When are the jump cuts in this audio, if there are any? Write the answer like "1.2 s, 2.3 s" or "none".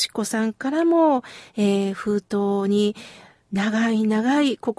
none